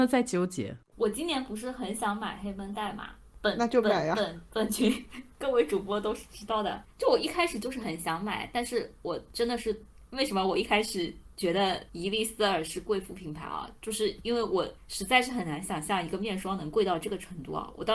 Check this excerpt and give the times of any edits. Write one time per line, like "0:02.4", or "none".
0:00.9